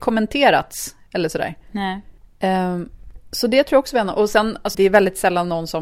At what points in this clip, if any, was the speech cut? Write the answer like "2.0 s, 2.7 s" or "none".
4.7 s